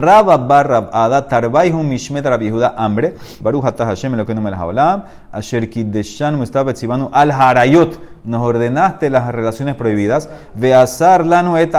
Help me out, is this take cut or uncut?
cut